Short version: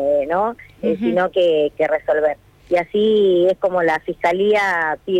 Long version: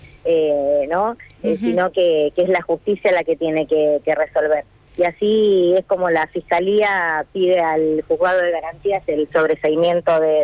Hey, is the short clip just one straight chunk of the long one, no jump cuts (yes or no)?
no